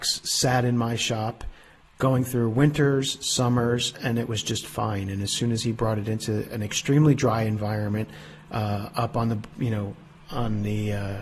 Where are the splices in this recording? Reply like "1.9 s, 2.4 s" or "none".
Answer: none